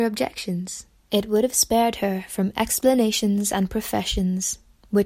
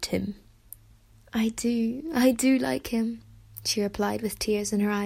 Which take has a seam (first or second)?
first